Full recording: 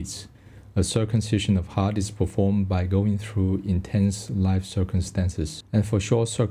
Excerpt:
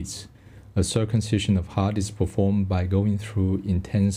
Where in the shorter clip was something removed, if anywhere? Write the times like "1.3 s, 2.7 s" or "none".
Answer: none

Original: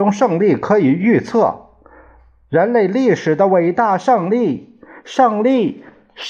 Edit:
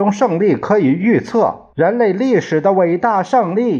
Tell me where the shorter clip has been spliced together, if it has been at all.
1.7 s

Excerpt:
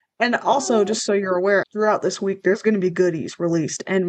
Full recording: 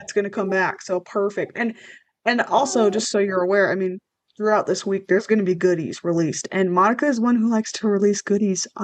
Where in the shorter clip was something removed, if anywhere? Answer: 1.6 s

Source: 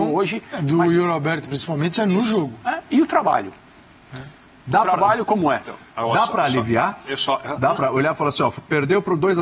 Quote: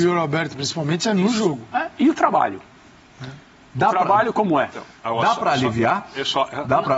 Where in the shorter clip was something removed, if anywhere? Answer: none

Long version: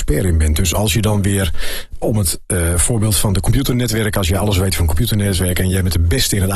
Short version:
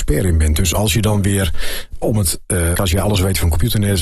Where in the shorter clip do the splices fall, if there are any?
2.7 s

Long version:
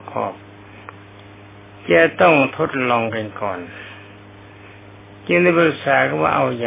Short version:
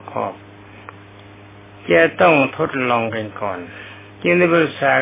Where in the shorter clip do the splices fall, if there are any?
4.1 s

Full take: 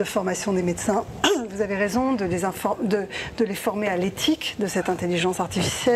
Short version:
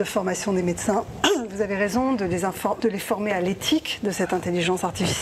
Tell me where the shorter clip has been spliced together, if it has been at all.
2.8 s

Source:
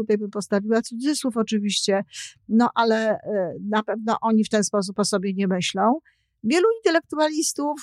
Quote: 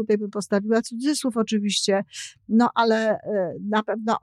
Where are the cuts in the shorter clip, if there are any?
none

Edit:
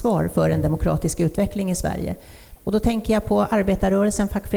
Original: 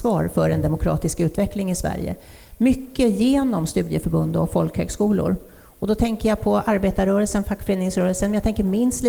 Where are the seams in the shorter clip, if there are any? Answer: 2.6 s

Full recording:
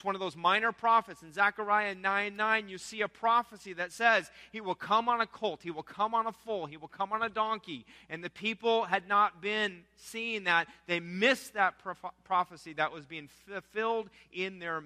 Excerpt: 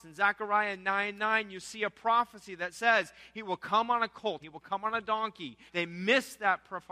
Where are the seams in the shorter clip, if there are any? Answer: 4.4 s, 5.7 s

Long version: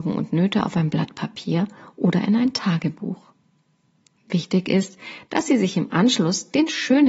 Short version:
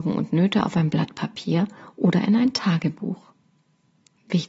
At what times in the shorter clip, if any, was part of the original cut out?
none

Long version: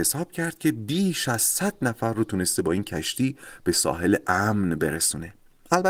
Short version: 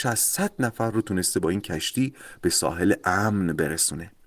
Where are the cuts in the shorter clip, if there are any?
none

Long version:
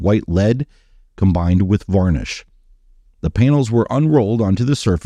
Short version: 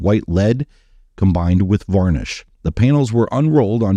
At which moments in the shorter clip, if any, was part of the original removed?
2.5 s

